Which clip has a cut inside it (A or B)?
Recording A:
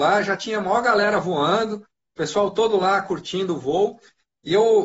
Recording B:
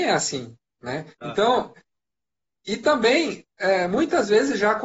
B